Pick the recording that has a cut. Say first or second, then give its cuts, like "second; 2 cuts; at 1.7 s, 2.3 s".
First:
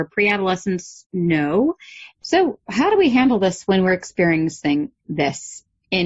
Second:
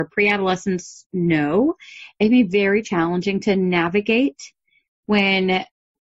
first; 1 cut; at 2.1 s